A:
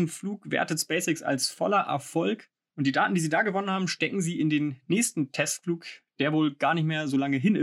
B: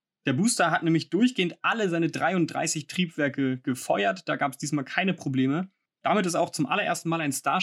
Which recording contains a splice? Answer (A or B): B